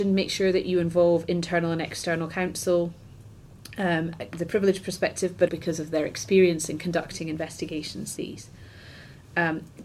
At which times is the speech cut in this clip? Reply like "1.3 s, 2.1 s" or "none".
4.3 s, 5.5 s, 8.2 s

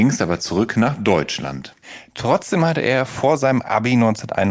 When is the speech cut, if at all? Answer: none

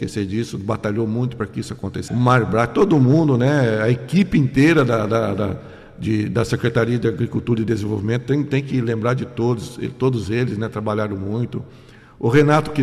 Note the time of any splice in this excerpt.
2.1 s

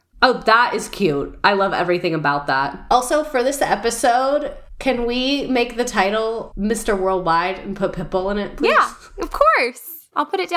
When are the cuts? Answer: none

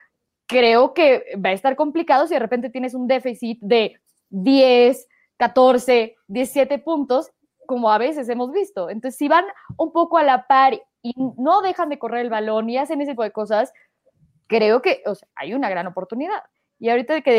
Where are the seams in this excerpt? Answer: 13.2 s

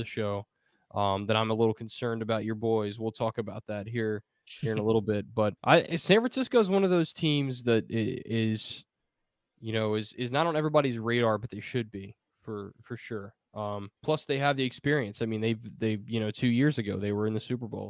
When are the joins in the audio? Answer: 5.6 s, 14.0 s

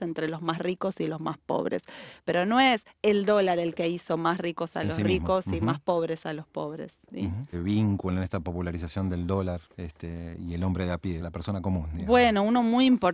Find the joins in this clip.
7.5 s, 11.2 s

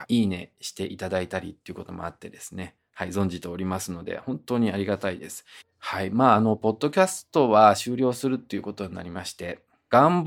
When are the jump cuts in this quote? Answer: 5.6 s

